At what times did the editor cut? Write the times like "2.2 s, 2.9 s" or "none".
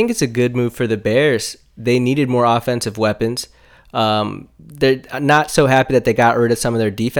none